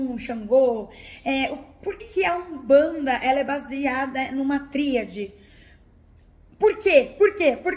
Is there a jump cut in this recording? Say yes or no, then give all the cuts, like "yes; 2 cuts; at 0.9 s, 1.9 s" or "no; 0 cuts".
yes; 1 cut; at 2.0 s